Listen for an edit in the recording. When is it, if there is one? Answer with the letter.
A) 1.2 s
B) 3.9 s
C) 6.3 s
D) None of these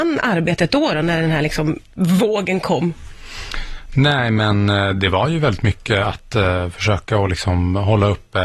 D